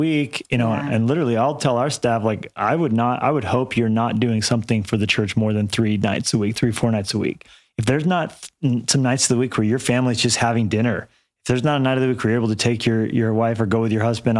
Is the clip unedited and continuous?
yes; 0 cuts

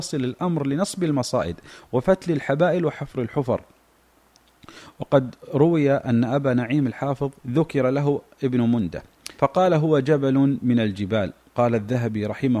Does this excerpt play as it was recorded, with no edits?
no; 2 cuts; at 7.4 s, 9.4 s

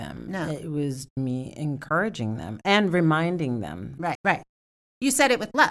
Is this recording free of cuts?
no; 2 cuts; at 1.1 s, 4.1 s

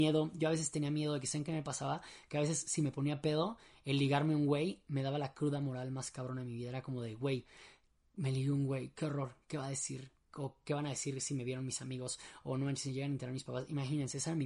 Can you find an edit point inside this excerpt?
no; 0 cuts

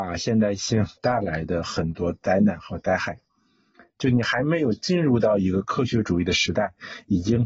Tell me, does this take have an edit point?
yes; 1 cut; at 1.0 s

